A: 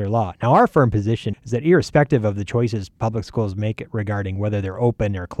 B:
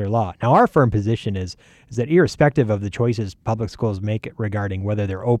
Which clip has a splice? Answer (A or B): A